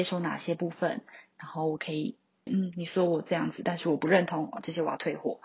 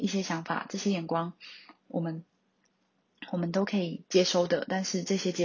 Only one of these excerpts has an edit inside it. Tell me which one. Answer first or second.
first